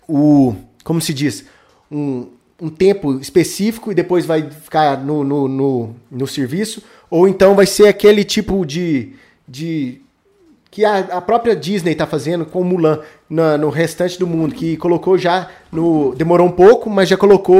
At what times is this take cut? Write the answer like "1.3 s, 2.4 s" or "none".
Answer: none